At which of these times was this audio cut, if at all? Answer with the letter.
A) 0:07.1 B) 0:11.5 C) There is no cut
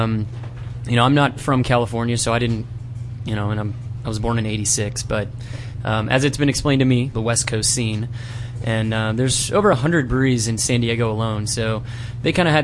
A